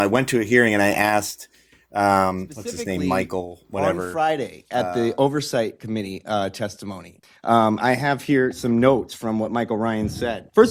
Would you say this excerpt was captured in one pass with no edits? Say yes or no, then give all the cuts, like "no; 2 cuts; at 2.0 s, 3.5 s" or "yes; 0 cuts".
yes; 0 cuts